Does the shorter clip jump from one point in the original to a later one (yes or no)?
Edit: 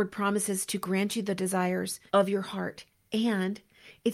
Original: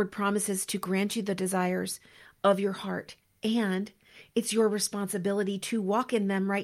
yes